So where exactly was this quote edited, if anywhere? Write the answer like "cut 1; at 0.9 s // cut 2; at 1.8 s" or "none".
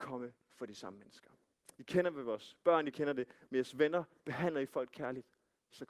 cut 1; at 1.8 s // cut 2; at 2.9 s